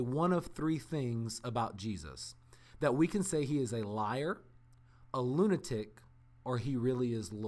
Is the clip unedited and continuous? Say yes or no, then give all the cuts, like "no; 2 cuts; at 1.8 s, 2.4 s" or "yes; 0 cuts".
yes; 0 cuts